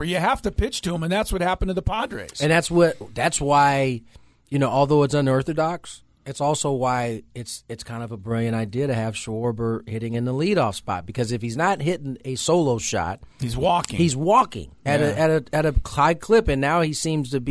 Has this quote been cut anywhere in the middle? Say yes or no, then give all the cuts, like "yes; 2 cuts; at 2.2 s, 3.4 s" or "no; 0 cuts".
no; 0 cuts